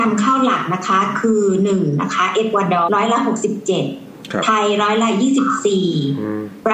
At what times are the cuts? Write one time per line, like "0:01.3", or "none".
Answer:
0:02.9

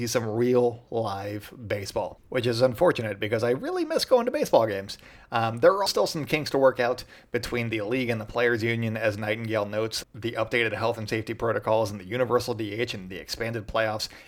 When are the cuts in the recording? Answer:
0:05.9
0:10.0

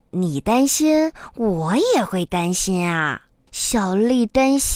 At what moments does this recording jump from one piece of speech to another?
0:03.5

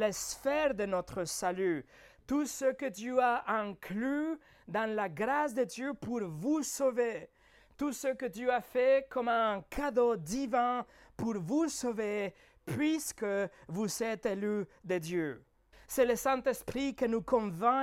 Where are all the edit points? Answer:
0:15.7

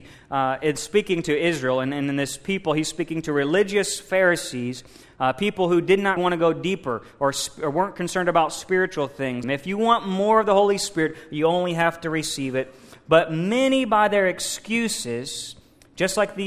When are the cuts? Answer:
0:06.2
0:09.4

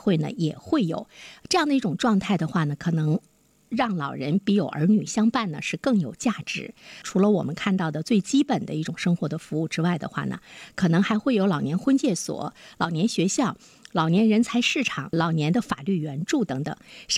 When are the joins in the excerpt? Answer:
0:07.0
0:15.1

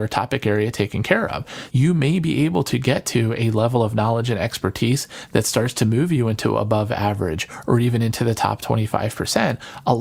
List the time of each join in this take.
0:01.7

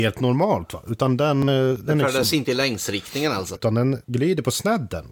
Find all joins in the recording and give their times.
0:03.6

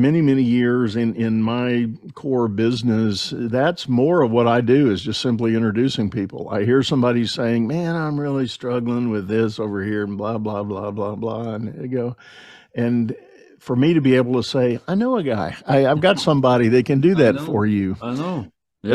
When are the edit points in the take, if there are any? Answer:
none

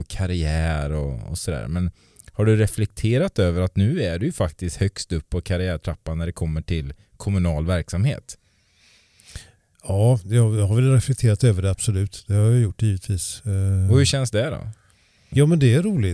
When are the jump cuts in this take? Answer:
none

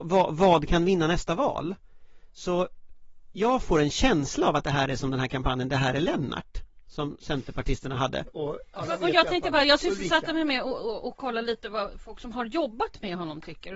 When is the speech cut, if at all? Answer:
0:08.3

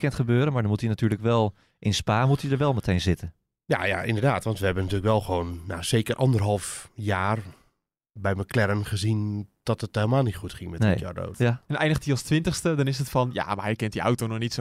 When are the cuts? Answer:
0:11.3

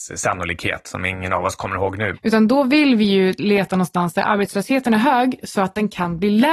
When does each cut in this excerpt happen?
0:02.1

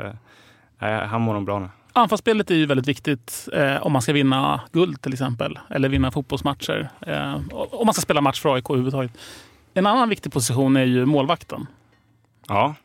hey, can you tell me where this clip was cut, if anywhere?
0:01.9

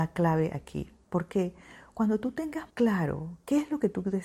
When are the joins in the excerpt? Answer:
0:02.7

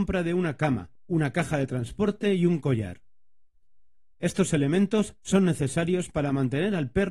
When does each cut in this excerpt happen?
0:01.0

